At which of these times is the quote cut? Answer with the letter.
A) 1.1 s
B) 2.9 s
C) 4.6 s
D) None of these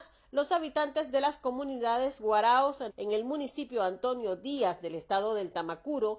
B